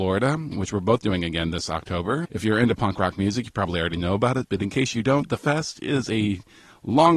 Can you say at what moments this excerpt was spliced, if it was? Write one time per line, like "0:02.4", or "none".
0:02.2